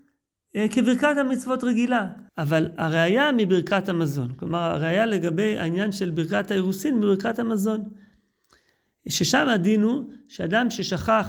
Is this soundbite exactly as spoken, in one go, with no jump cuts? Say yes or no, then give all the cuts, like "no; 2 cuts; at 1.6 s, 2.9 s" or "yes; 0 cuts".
no; 1 cut; at 2.3 s